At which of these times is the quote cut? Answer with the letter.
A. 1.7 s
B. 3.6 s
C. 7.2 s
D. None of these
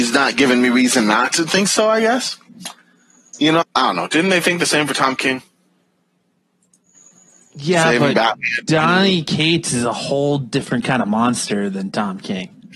B